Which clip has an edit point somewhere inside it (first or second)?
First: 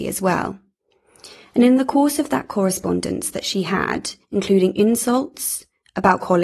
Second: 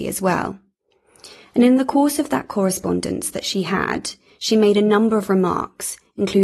first